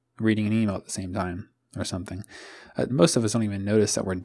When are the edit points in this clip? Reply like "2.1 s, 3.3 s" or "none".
2.9 s